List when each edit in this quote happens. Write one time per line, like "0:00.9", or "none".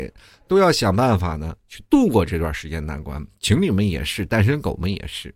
none

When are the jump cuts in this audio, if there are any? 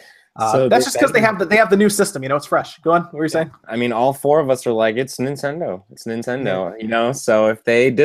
0:03.6

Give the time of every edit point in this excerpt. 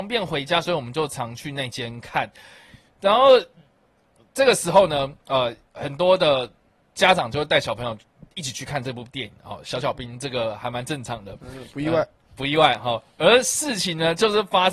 none

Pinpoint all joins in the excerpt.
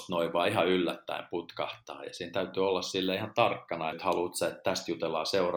0:03.9

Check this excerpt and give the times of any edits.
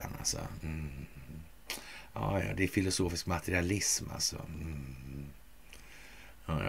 none

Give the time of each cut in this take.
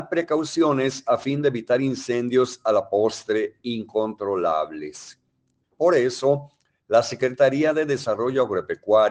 0:05.6

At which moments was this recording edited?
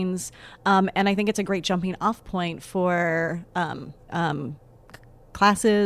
0:04.1

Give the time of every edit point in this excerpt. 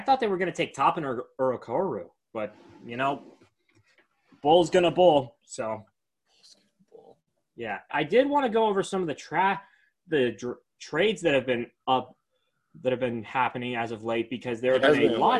0:07.9

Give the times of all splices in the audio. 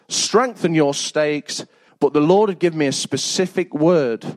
0:01.9

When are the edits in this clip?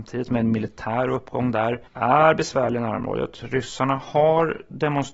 0:01.9

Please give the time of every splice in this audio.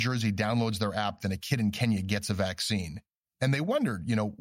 0:03.2

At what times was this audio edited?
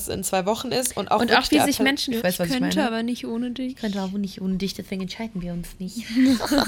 0:02.2

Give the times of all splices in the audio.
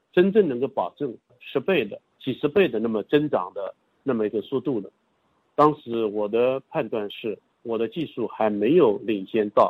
none

